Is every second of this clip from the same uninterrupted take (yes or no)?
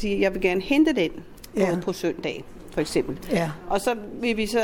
yes